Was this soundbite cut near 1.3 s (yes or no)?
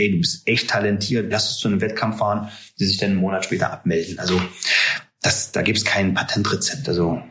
yes